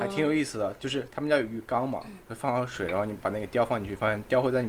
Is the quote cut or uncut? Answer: uncut